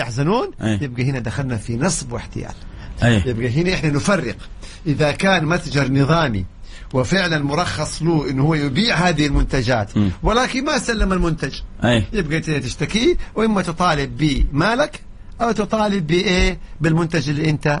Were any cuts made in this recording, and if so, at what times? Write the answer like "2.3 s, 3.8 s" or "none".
none